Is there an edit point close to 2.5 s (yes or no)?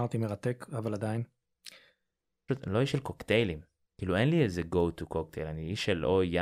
yes